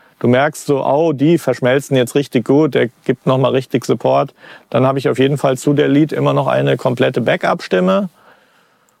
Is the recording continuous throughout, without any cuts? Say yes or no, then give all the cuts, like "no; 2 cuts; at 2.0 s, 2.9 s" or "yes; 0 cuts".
yes; 0 cuts